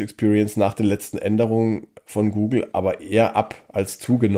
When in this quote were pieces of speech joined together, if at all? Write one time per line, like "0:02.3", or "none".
none